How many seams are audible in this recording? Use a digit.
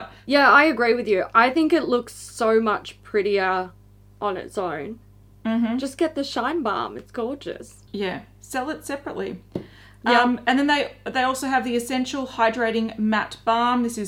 1